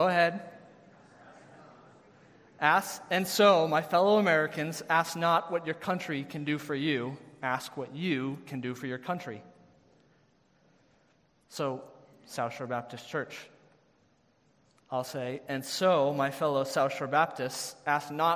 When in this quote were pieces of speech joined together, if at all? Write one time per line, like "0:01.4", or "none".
none